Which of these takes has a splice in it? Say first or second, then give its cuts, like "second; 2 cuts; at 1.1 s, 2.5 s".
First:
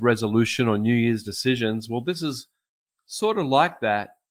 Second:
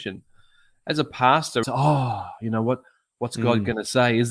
second; 1 cut; at 1.6 s